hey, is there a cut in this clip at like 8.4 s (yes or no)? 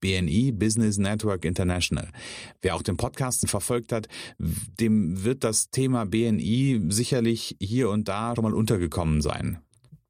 yes